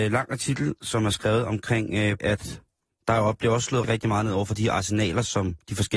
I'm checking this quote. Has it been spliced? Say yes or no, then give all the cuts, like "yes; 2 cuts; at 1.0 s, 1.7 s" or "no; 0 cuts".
yes; 2 cuts; at 2.2 s, 3.8 s